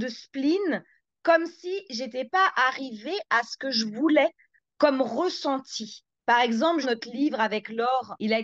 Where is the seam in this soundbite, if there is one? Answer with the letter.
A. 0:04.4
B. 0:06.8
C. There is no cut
B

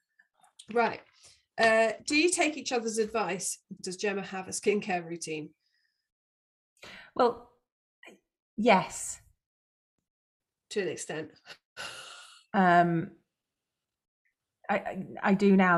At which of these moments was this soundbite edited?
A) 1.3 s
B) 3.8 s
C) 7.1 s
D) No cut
B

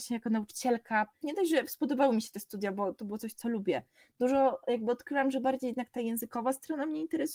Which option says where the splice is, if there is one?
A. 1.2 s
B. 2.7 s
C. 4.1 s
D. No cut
A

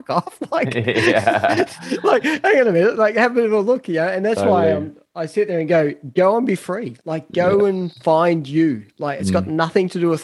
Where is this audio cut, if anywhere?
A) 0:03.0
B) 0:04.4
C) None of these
C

